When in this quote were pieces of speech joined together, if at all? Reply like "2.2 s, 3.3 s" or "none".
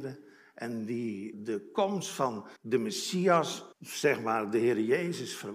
1.3 s, 2.6 s, 3.7 s